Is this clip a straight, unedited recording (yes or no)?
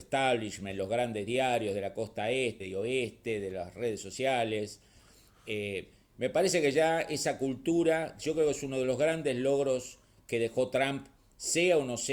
no